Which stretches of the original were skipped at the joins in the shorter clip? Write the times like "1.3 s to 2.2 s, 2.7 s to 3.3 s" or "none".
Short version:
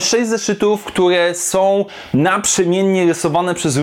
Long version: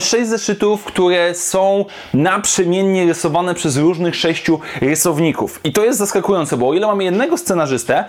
none